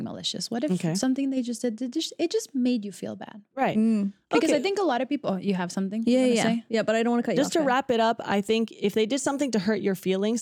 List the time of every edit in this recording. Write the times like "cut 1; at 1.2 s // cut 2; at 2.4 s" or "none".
none